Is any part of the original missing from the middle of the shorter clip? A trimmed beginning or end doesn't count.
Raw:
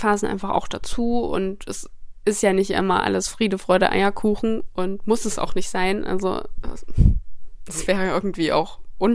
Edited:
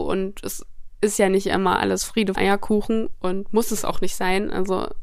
yes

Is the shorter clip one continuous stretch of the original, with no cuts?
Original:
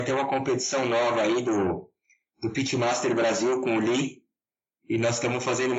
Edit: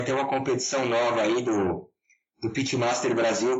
yes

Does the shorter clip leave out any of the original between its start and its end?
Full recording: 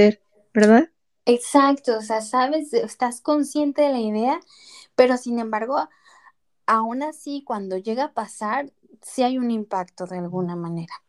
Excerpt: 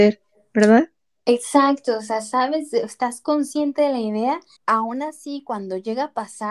yes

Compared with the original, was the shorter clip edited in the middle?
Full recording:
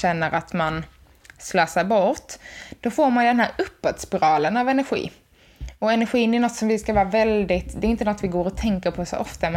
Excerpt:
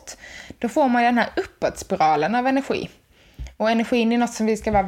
no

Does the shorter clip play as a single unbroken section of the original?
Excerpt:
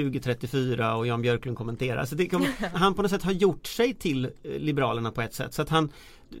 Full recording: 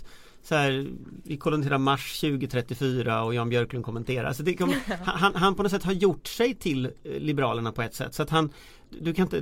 no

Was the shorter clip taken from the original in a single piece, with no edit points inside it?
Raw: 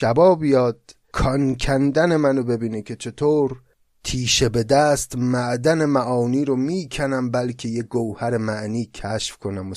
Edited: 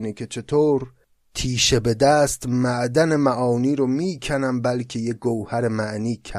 yes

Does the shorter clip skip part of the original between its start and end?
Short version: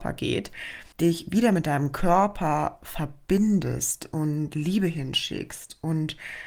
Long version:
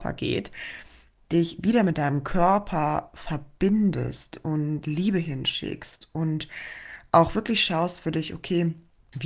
yes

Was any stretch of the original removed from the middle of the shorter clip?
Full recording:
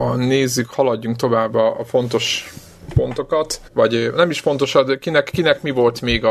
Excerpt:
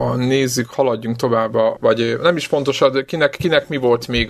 yes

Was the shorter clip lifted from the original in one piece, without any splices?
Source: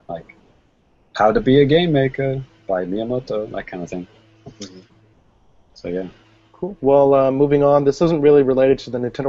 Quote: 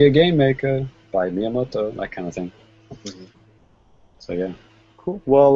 yes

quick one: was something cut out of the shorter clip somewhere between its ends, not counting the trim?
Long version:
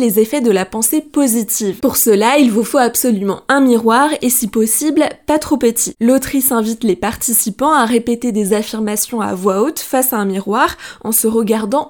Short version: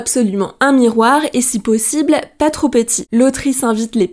no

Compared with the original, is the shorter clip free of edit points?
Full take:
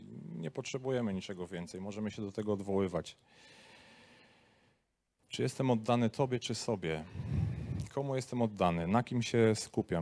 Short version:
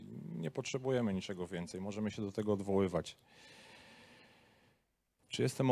yes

